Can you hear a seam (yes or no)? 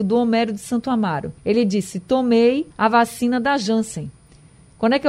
yes